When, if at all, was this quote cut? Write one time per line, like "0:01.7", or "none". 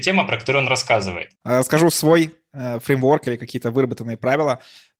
0:01.4